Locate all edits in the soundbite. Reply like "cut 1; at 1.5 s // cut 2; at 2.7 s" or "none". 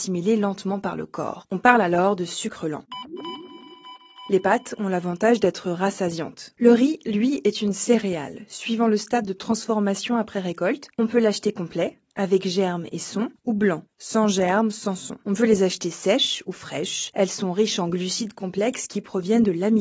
cut 1; at 6.5 s // cut 2; at 15.2 s